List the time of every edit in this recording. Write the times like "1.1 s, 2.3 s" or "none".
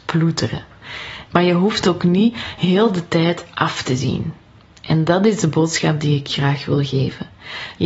1.3 s